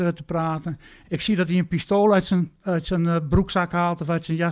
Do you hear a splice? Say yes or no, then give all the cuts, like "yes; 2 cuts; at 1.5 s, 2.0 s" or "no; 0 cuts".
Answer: yes; 1 cut; at 1.0 s